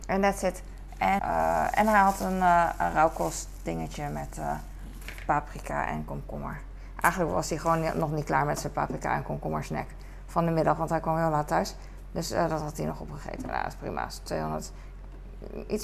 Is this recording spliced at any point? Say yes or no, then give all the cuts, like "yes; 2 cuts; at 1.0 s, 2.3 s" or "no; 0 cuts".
yes; 1 cut; at 1.2 s